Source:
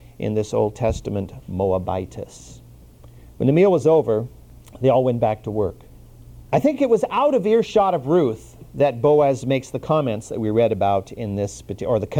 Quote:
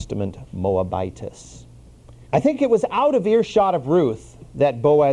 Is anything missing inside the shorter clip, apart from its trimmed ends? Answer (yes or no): yes